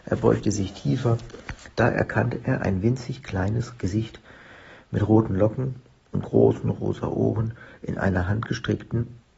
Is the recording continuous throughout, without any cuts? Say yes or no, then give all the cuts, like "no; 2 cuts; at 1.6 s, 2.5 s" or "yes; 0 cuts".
yes; 0 cuts